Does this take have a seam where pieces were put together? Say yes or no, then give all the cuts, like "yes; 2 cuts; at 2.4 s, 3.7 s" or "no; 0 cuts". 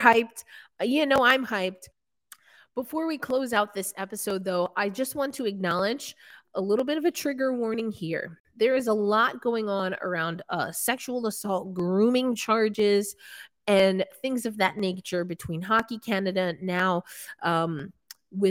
yes; 1 cut; at 6.4 s